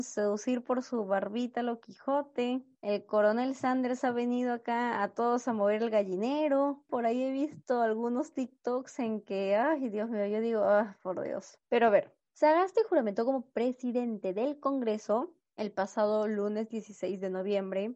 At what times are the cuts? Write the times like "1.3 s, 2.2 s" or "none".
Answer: 6.9 s, 11.6 s